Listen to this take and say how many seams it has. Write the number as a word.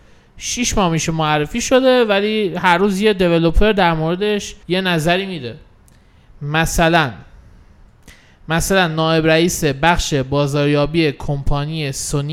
one